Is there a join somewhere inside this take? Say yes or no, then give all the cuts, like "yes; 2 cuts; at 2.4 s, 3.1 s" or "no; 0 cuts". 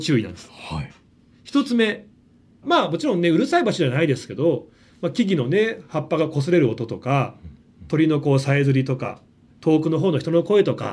yes; 1 cut; at 2.6 s